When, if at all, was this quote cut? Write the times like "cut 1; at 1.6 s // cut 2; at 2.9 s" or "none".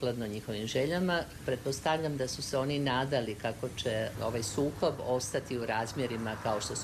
none

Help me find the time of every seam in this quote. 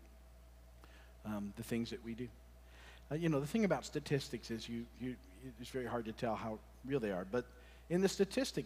cut 1; at 3.0 s

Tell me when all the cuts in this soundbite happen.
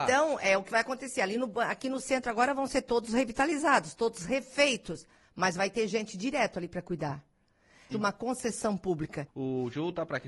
cut 1; at 7.9 s // cut 2; at 9.3 s

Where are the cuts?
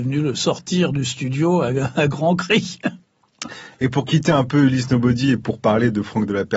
cut 1; at 3.0 s

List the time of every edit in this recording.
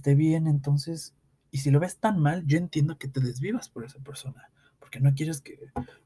none

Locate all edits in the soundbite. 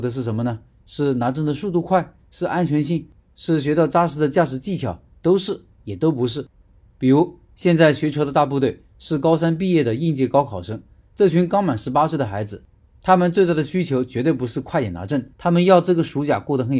cut 1; at 6.8 s // cut 2; at 15.3 s

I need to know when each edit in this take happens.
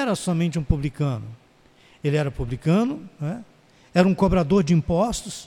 none

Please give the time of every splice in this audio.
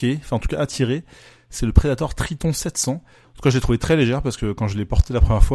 cut 1; at 3.2 s

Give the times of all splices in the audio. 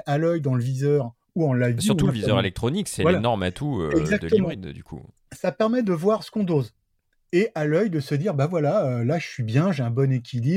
none

